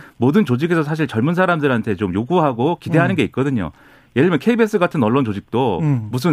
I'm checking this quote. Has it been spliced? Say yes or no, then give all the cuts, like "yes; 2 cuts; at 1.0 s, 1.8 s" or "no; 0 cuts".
no; 0 cuts